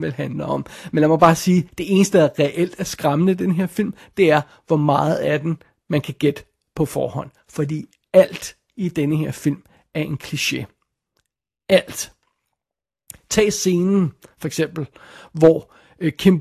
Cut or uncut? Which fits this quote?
uncut